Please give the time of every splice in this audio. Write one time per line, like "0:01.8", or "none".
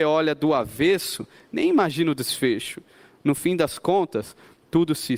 none